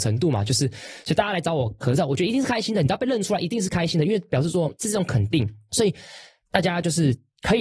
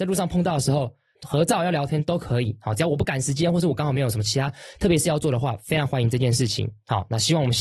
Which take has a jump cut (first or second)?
second